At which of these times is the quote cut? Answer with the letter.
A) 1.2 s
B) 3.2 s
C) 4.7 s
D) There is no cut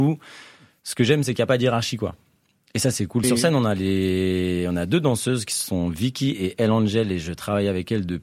B